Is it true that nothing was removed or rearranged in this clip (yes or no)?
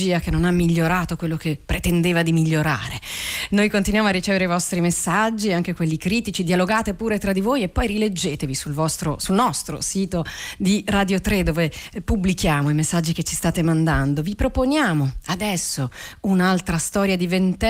yes